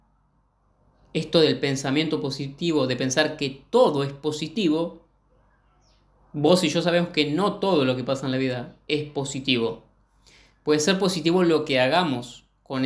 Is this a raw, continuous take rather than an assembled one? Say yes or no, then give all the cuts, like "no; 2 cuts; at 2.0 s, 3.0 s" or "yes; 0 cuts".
yes; 0 cuts